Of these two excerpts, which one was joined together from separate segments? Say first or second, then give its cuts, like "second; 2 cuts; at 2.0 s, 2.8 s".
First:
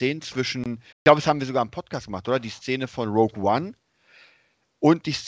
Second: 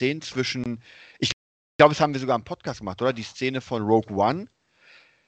first; 1 cut; at 0.9 s